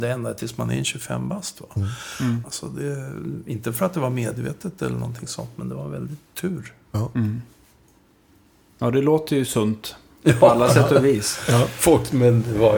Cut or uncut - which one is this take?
cut